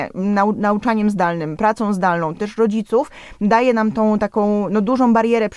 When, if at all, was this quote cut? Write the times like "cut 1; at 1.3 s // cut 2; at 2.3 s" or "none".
none

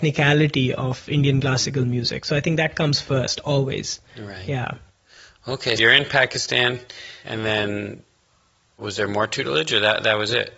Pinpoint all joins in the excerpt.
cut 1; at 5.8 s // cut 2; at 7.2 s

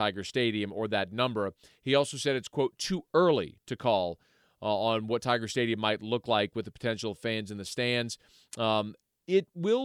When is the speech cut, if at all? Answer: none

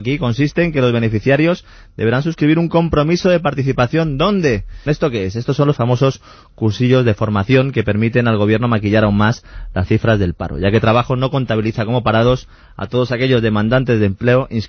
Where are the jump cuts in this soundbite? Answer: cut 1; at 4.9 s

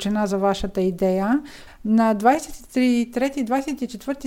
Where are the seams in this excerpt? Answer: cut 1; at 1.7 s

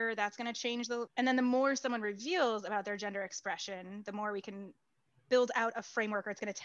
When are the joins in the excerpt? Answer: cut 1; at 1.1 s

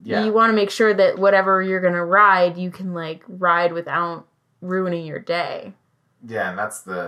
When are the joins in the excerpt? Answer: cut 1; at 1.1 s

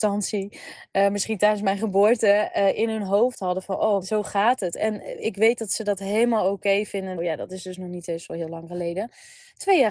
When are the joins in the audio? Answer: cut 1; at 4.0 s // cut 2; at 7.2 s

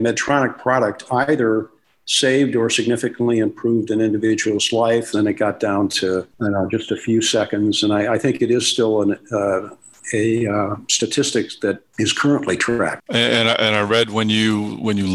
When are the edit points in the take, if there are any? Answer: cut 1; at 5.1 s // cut 2; at 13.1 s

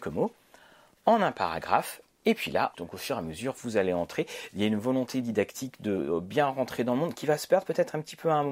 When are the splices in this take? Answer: cut 1; at 2.7 s

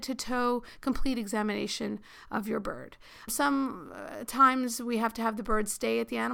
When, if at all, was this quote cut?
cut 1; at 3.3 s

